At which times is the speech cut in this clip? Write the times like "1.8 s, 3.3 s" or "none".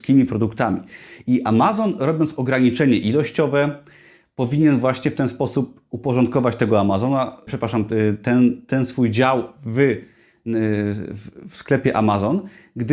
7.5 s